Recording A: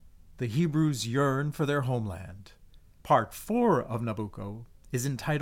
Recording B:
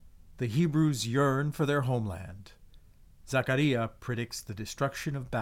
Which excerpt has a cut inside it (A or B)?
A